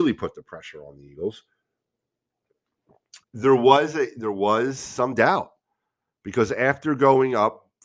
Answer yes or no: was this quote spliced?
yes